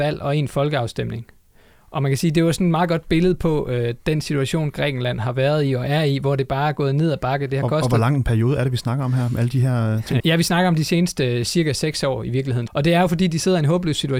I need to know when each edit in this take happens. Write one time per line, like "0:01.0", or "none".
0:10.2
0:12.7

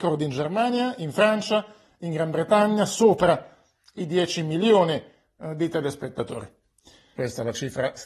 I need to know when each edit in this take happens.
0:07.2

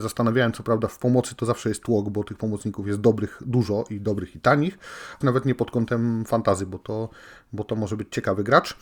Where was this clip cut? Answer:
0:05.2

